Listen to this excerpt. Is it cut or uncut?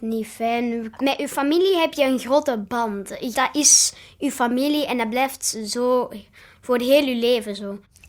cut